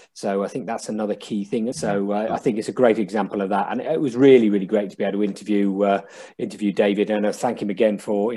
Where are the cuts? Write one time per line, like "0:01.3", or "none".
0:01.7